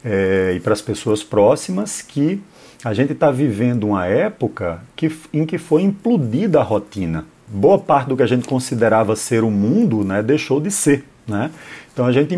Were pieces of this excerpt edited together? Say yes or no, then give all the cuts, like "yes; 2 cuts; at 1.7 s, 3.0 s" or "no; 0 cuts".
no; 0 cuts